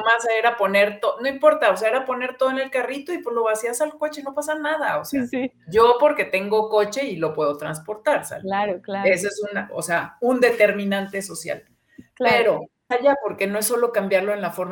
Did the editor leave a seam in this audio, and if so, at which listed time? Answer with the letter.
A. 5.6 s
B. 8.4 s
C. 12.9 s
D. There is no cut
C